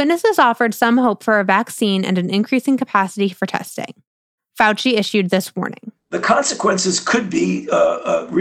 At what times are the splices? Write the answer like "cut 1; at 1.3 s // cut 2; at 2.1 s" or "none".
cut 1; at 4.4 s